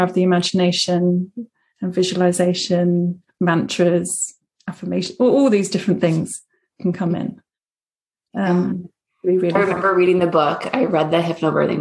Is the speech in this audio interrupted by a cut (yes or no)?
no